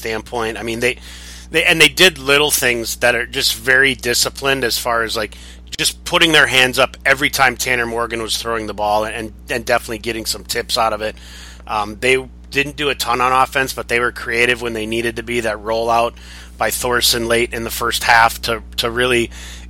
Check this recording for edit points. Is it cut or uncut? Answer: uncut